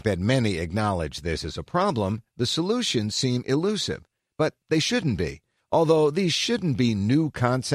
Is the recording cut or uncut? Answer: cut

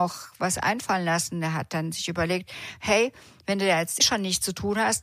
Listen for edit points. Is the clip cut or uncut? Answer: cut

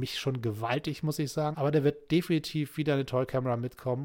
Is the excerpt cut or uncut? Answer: cut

